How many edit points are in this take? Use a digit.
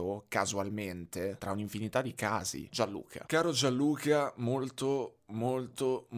1